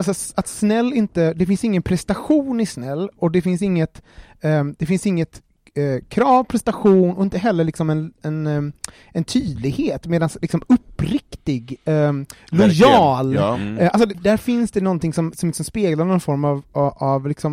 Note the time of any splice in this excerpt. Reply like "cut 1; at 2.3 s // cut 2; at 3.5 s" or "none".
cut 1; at 14.1 s